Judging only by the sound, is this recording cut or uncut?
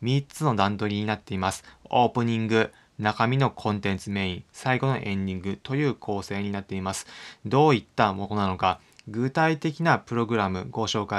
uncut